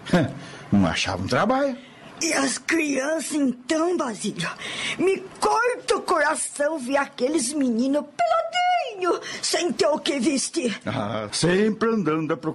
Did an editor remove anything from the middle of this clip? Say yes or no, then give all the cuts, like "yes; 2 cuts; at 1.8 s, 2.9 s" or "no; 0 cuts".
yes; 1 cut; at 11.3 s